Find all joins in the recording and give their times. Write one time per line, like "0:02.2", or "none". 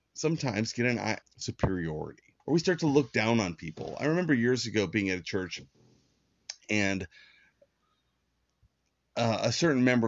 0:01.2
0:02.4